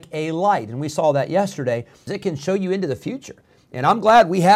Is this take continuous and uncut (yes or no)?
no